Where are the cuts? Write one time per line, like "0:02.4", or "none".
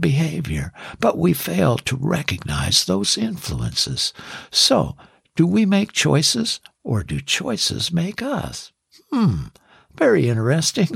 none